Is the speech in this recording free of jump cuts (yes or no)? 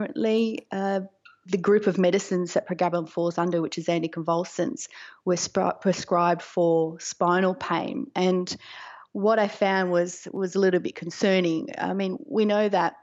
yes